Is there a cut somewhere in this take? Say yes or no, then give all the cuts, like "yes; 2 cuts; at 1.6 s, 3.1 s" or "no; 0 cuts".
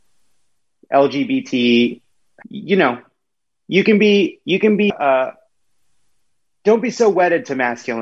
yes; 2 cuts; at 2.4 s, 4.9 s